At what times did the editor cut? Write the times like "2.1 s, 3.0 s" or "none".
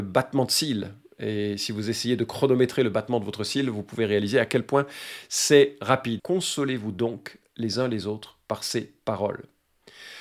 6.2 s